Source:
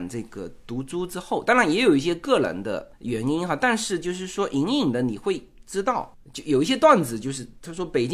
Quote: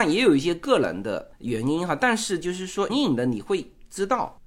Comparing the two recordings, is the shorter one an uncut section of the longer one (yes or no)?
no